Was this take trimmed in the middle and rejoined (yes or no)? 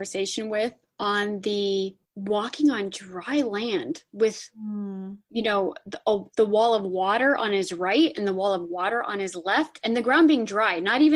yes